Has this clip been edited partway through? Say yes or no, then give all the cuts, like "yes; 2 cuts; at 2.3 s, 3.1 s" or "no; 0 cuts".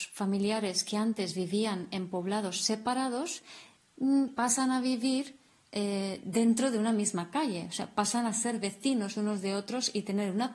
no; 0 cuts